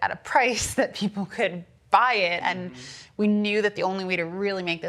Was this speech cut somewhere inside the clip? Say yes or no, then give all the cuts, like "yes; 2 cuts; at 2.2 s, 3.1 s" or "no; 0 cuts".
yes; 1 cut; at 2.4 s